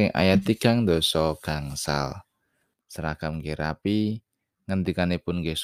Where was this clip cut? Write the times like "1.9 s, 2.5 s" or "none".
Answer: 2.7 s